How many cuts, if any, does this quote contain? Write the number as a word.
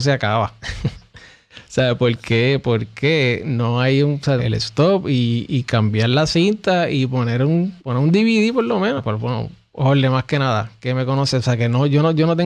three